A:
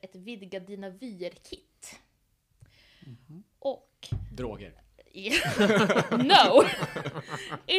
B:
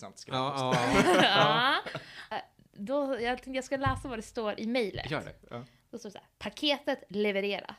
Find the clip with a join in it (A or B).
B